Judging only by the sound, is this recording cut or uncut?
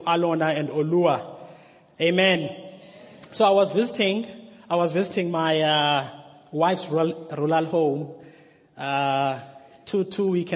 uncut